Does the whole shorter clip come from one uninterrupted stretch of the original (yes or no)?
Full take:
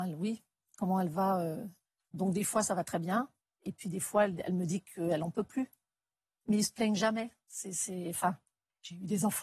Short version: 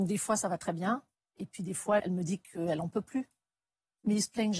no